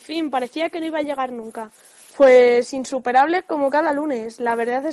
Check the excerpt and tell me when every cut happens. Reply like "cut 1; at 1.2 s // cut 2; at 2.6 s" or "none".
cut 1; at 2.1 s